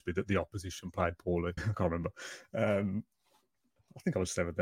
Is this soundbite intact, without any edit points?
no; 1 cut; at 1.6 s

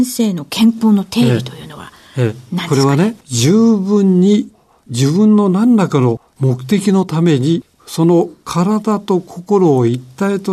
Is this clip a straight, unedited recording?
no; 2 cuts; at 3.2 s, 7.7 s

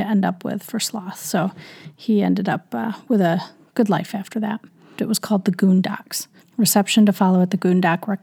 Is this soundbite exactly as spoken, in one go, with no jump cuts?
no; 2 cuts; at 5.0 s, 6.4 s

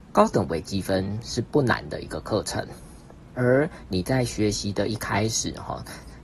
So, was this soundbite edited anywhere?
yes; 1 cut; at 3.3 s

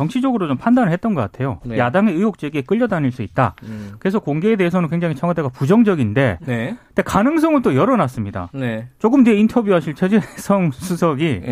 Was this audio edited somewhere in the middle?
no; 0 cuts

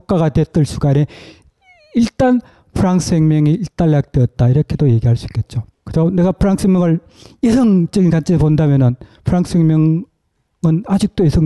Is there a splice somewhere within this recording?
yes; 1 cut; at 5.7 s

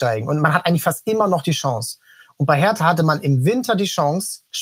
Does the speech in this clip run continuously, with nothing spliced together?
yes; 0 cuts

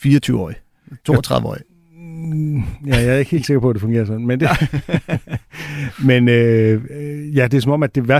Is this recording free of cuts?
yes; 0 cuts

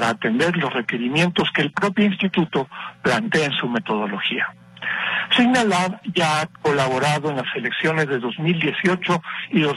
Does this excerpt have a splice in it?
yes; 1 cut; at 6.6 s

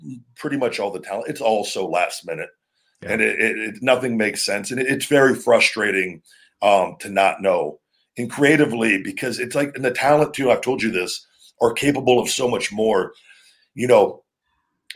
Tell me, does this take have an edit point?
no; 0 cuts

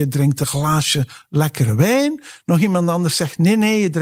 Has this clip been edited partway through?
no; 0 cuts

